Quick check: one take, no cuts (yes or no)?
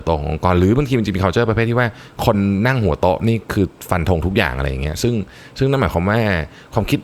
yes